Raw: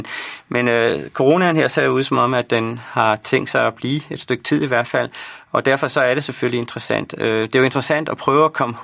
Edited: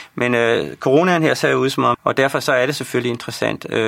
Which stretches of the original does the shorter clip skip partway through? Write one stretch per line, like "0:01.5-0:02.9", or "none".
0:02.3-0:05.4